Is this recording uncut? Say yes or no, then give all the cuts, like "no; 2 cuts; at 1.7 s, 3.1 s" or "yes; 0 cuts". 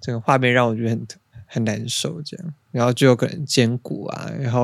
yes; 0 cuts